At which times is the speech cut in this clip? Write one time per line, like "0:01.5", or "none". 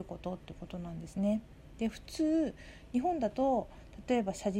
none

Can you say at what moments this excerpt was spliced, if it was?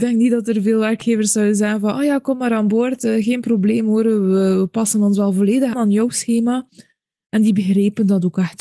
0:05.7

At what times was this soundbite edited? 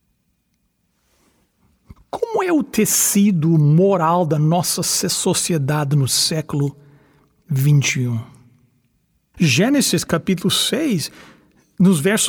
0:02.0
0:09.3

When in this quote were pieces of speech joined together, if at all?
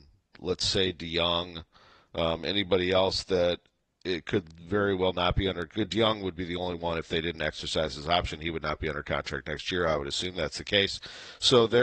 none

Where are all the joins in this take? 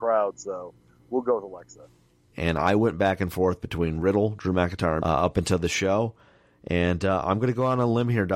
0:02.3
0:05.0

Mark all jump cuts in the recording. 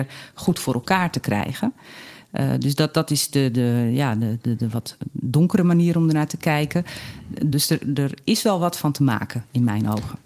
0:07.5

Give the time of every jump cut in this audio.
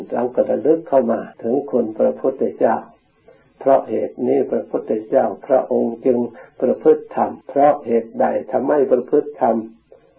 0:01.3
0:07.4

